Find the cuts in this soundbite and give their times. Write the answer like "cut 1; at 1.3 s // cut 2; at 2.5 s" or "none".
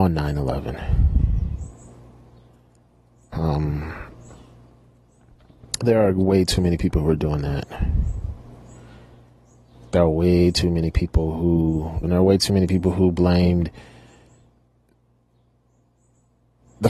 cut 1; at 3.3 s // cut 2; at 12.0 s

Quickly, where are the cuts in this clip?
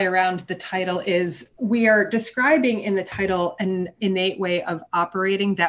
cut 1; at 1.5 s

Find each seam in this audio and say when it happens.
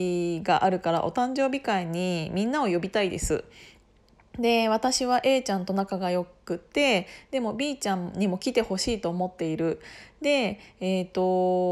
none

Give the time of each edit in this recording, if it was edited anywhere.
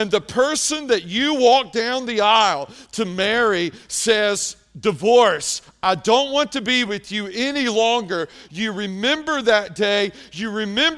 cut 1; at 8.5 s

